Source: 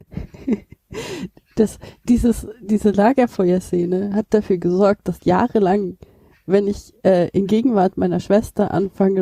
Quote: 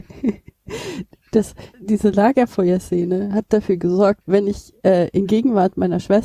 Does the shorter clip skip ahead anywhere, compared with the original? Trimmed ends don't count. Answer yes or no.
yes